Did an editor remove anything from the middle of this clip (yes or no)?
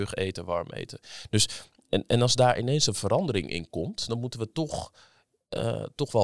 no